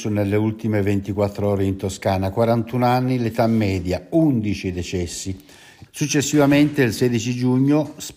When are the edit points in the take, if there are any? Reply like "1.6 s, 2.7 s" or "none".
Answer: 5.9 s

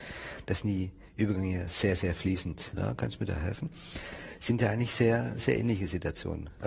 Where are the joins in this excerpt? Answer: 2.7 s

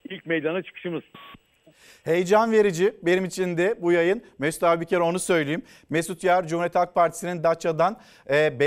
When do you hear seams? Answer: none

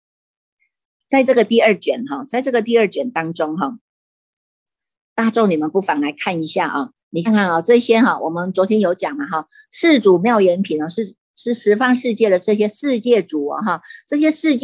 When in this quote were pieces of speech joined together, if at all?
7.3 s

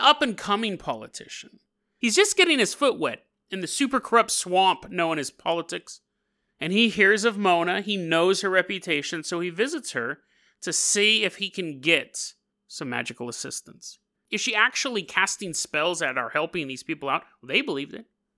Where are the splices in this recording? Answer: 14.1 s

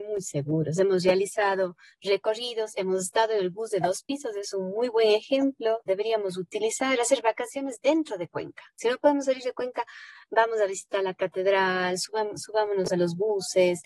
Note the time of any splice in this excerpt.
none

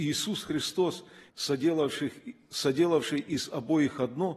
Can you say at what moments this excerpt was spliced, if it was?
1.3 s

